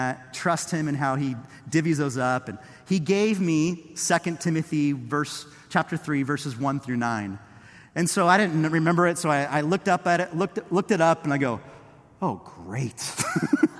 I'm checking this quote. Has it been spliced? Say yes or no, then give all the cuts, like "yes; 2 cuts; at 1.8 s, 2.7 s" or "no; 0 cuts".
no; 0 cuts